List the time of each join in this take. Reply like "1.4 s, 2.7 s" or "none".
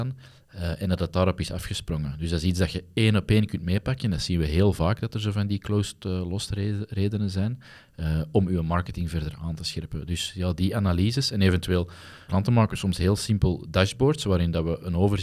12.3 s